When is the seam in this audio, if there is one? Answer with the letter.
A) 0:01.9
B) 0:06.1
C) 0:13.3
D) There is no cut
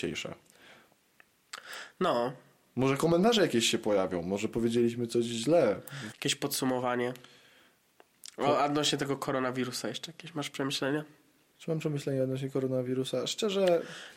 B